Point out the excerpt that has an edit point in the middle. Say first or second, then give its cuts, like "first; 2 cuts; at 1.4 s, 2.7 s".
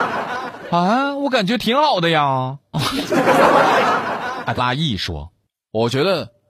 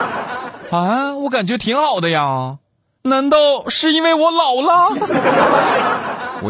first; 2 cuts; at 2.7 s, 4.6 s